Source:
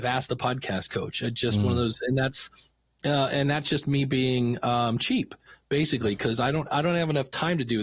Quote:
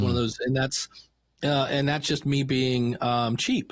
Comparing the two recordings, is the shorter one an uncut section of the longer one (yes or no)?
yes